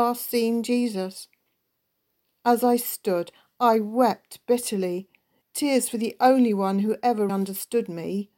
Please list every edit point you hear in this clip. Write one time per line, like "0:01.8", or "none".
0:05.4
0:07.3